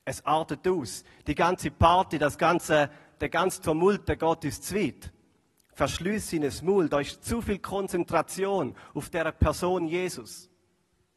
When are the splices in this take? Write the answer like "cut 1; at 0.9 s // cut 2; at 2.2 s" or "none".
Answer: none